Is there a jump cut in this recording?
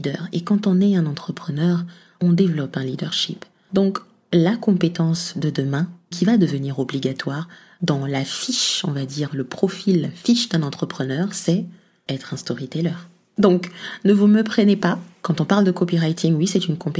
no; 0 cuts

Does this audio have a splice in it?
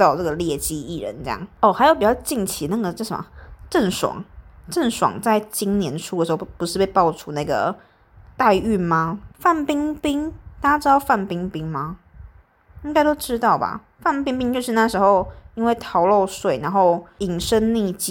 yes; 1 cut; at 9.3 s

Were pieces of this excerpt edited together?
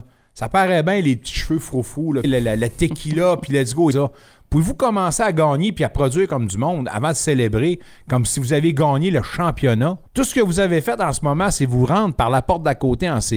yes; 3 cuts; at 2.2 s, 3.9 s, 10.1 s

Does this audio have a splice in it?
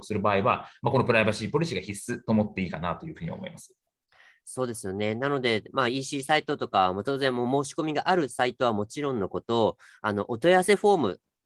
no; 0 cuts

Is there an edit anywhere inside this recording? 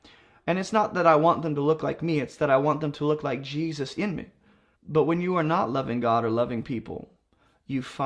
yes; 1 cut; at 4.8 s

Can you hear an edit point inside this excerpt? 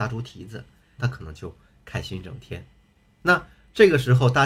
yes; 1 cut; at 1.0 s

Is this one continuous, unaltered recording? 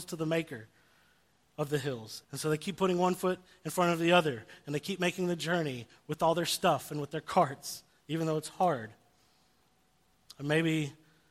no; 1 cut; at 2.2 s

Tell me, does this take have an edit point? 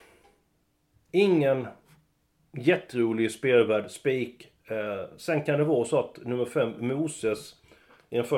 no; 0 cuts

